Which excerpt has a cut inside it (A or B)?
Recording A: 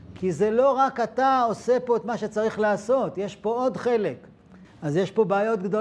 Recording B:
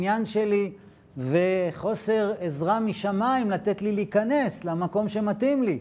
A